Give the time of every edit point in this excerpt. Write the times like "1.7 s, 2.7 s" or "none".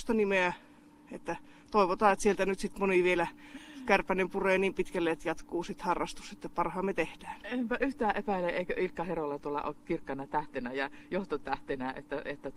none